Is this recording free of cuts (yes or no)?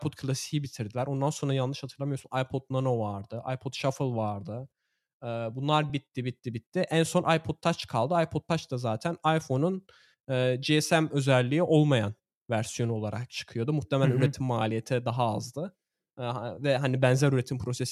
yes